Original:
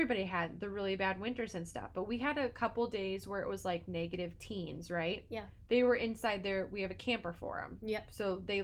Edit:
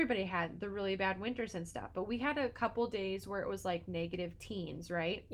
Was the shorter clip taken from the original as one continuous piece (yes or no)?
yes